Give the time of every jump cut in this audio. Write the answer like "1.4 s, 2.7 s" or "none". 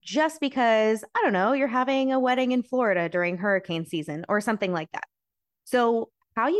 none

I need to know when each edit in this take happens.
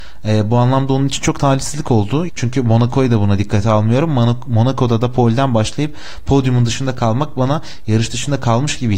2.3 s

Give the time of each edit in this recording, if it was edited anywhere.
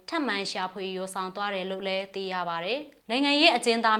3.0 s

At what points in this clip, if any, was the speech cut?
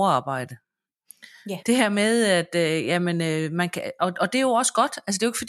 1.6 s

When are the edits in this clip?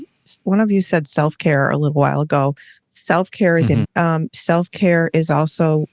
3.8 s

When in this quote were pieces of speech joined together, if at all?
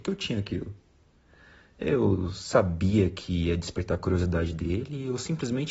none

